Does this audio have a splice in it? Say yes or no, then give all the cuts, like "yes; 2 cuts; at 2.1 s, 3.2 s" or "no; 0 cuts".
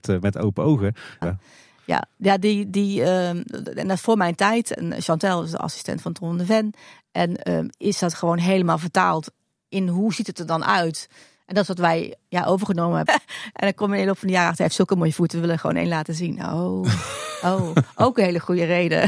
yes; 3 cuts; at 1.2 s, 4.7 s, 13.1 s